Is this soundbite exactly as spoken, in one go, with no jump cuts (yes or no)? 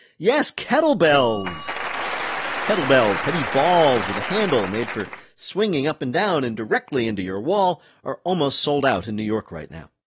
yes